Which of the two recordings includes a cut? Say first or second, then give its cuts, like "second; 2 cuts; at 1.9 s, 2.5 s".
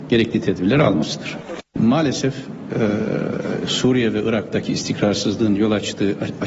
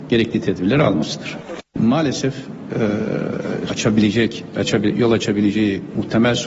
second; 1 cut; at 3.7 s